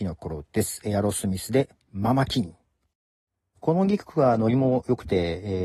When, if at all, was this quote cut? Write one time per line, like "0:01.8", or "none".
0:03.5